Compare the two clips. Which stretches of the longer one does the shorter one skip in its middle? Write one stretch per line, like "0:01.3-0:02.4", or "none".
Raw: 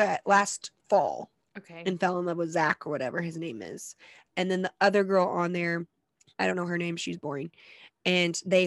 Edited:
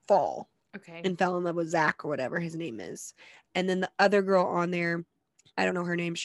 none

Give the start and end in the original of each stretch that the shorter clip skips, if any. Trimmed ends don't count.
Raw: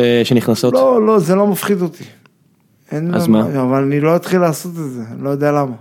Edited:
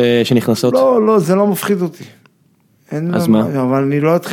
none

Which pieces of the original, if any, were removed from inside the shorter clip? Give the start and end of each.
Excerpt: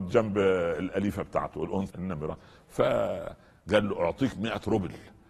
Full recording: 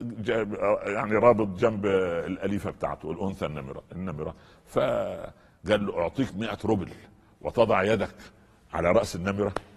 0:03.4-0:03.9

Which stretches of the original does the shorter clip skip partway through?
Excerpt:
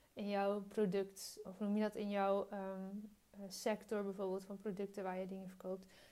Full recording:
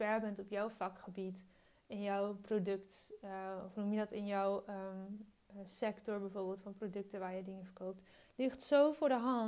0:03.2-0:03.6

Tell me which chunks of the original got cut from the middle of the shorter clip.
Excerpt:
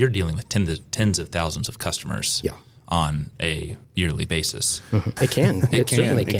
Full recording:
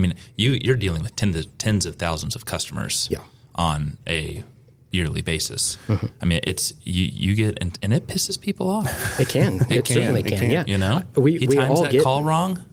0:04.5-0:04.8
0:06.1-0:09.1

